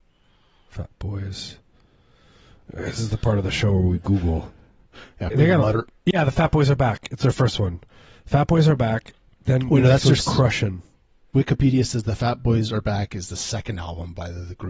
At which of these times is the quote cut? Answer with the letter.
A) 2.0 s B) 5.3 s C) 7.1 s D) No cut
B